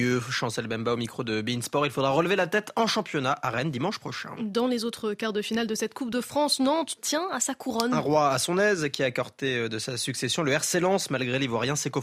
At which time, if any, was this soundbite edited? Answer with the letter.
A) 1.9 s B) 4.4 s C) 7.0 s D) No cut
C